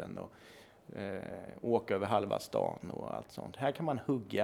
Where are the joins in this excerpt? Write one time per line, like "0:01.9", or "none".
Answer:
none